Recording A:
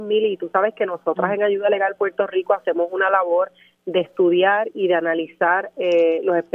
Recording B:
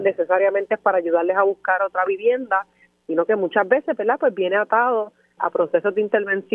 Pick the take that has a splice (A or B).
B